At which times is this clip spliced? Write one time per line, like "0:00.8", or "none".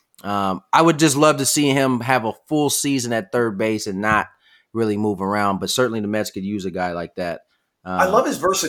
none